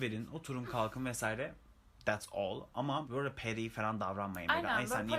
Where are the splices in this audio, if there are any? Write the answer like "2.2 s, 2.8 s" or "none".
3.0 s

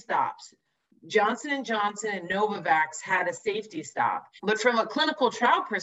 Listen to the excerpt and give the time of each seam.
4.4 s

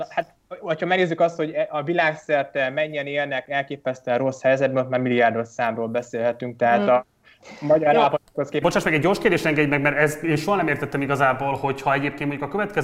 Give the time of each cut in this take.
8.6 s

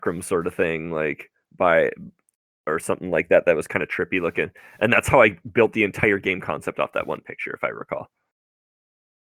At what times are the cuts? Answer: none

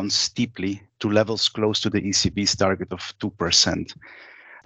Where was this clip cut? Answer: none

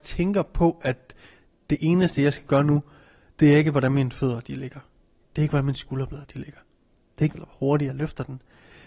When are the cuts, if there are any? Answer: 7.3 s

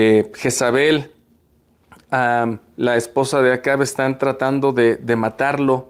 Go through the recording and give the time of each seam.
none

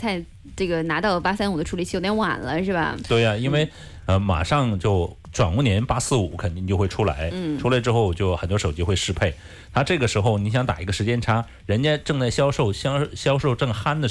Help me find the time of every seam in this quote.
none

